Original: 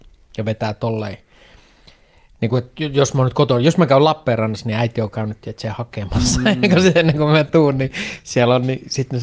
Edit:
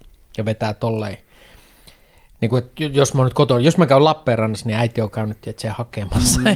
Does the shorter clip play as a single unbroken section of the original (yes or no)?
yes